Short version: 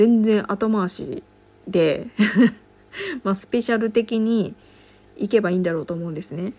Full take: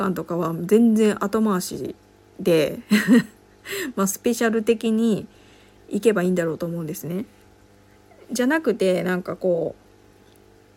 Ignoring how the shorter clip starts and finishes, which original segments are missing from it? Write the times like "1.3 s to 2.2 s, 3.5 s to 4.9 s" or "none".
none